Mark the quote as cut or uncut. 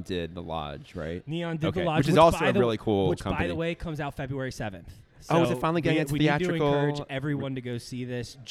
uncut